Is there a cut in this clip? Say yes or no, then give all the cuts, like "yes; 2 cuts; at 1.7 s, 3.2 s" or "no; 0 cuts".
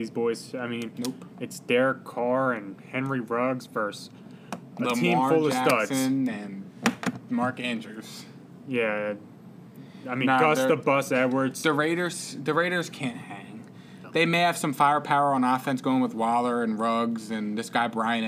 no; 0 cuts